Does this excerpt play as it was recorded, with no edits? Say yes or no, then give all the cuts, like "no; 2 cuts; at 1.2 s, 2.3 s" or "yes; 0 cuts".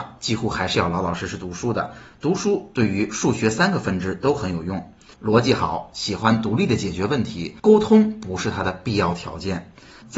no; 2 cuts; at 5.1 s, 7.6 s